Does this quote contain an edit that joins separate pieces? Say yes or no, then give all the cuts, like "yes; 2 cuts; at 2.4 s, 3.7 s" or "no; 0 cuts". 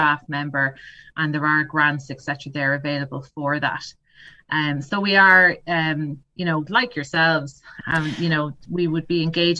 yes; 2 cuts; at 6.7 s, 7.8 s